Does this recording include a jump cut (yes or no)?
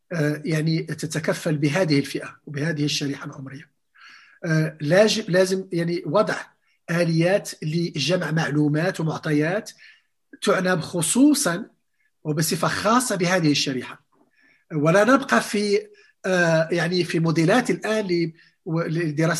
no